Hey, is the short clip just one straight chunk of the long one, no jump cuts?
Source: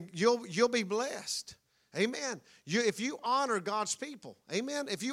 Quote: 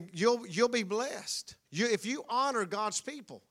no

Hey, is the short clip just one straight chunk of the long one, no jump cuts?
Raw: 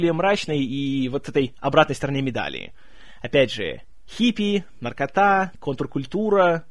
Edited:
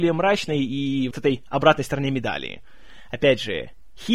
no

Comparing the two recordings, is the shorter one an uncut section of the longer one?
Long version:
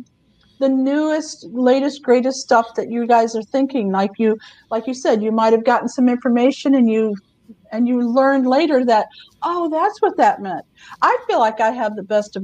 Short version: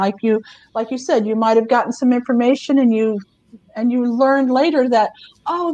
yes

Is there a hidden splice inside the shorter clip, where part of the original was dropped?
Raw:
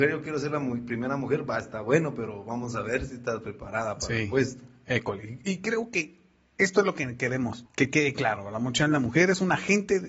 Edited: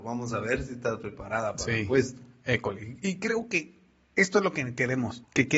no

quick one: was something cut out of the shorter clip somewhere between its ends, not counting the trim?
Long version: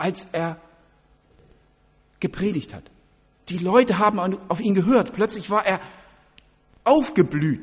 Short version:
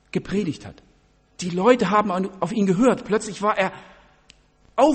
no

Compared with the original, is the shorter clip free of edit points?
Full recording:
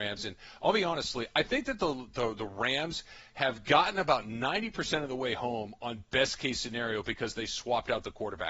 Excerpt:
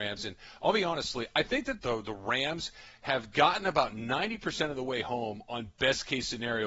no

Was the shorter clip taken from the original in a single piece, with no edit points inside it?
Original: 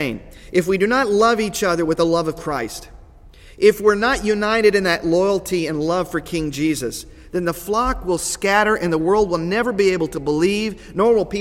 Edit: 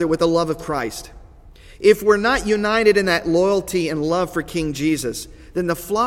yes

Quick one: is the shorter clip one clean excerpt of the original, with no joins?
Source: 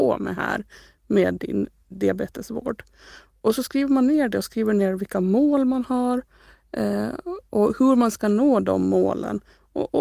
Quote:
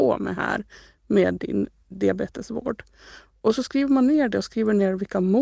yes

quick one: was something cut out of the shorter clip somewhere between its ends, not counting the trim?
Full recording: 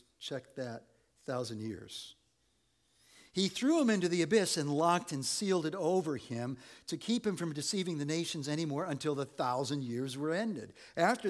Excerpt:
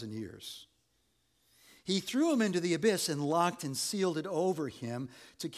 no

